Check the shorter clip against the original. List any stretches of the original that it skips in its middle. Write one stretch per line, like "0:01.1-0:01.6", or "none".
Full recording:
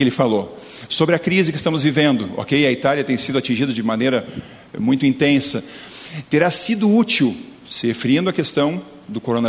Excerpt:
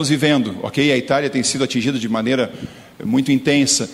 none